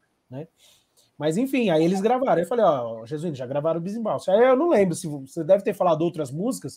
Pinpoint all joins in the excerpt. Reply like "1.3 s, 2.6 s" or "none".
none